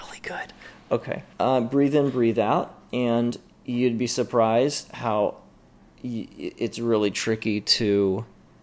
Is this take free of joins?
no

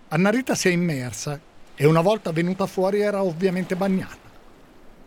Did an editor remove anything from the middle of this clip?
yes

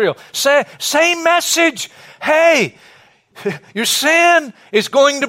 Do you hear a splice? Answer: no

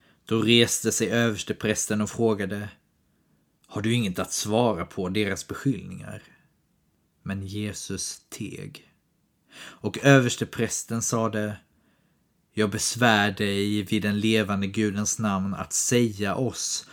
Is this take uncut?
yes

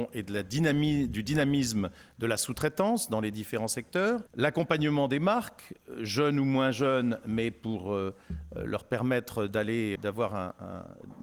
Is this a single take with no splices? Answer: no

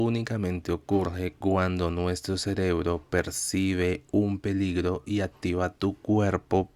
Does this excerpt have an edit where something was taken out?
no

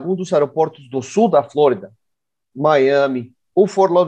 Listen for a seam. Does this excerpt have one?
yes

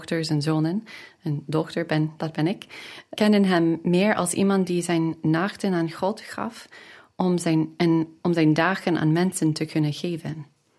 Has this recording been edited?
yes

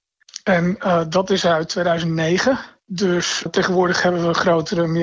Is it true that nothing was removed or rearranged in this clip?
no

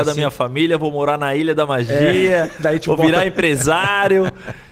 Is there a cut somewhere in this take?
no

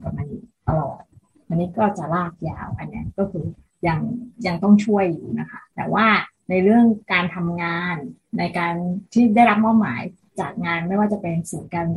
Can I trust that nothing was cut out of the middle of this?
no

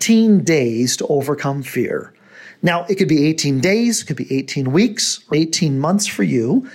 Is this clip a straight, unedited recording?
no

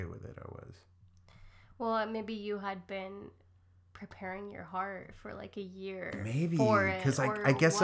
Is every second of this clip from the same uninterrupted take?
yes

